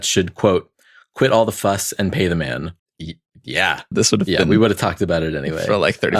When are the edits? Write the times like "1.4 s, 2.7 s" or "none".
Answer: 2.8 s, 3.9 s